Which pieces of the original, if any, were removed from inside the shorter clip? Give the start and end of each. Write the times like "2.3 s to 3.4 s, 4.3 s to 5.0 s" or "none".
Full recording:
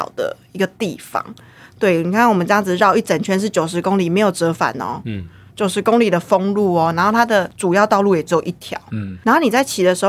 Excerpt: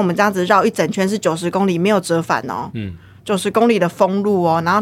none